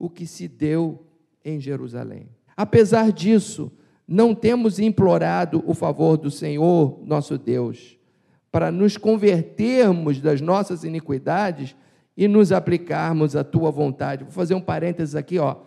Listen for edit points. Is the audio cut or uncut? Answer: cut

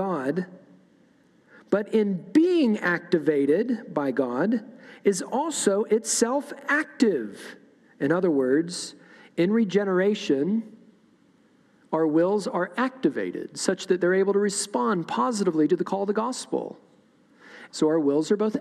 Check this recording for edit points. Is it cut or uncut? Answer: cut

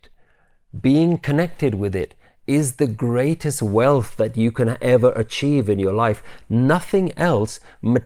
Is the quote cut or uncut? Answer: uncut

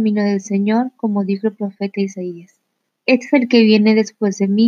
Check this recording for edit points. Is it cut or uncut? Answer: cut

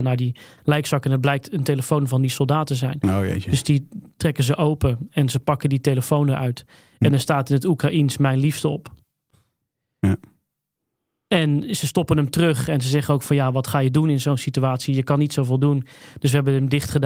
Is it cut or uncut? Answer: uncut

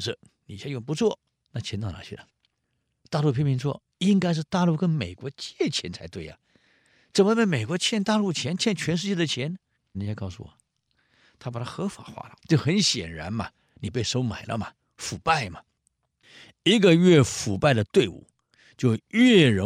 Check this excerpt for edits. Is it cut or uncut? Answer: cut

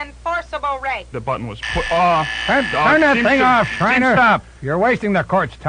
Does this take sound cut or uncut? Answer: cut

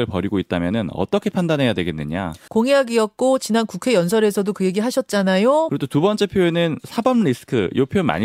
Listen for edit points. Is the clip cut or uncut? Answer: cut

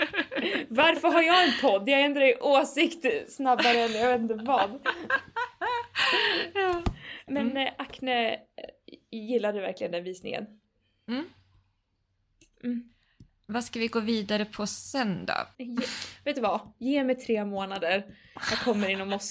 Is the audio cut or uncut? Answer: cut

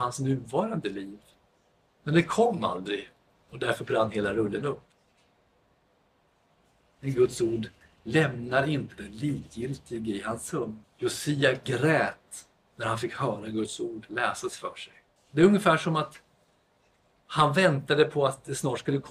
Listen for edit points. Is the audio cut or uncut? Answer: cut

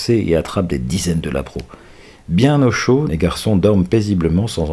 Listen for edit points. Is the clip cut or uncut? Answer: cut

